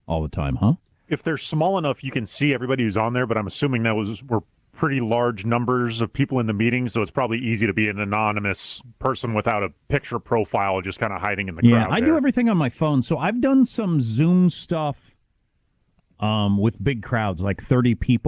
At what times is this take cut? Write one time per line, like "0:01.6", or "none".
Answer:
none